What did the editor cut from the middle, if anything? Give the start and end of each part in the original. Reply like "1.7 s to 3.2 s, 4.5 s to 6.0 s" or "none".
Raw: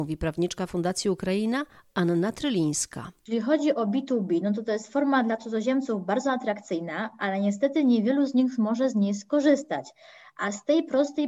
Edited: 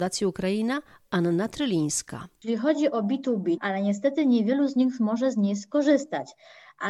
4.4 s to 7.1 s